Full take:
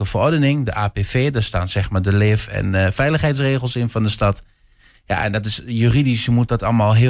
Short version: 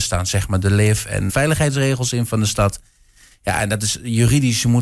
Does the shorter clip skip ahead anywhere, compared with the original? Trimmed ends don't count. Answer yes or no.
yes